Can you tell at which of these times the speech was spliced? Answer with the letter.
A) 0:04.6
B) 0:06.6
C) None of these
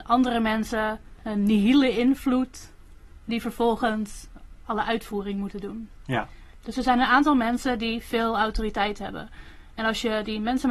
A